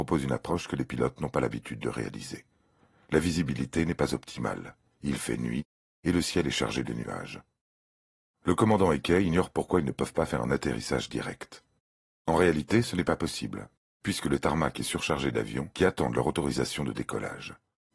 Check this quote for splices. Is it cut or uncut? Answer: uncut